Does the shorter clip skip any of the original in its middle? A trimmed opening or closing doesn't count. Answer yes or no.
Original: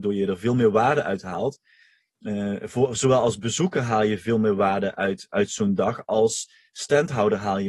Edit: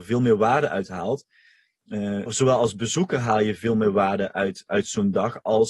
yes